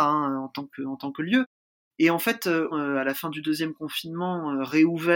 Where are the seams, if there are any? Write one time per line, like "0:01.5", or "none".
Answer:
0:02.7